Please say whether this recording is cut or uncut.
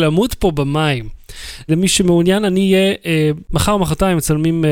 cut